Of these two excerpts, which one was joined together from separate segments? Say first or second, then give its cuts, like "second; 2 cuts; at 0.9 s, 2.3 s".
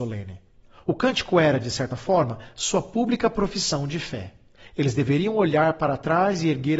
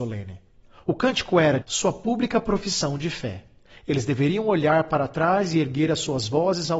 second; 1 cut; at 1.6 s